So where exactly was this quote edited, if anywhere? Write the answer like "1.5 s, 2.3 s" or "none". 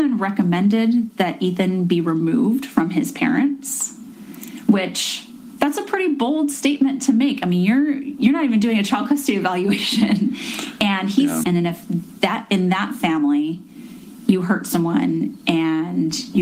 11.4 s